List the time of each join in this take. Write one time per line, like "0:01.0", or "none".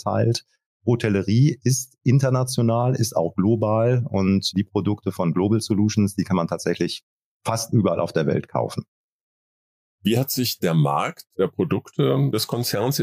none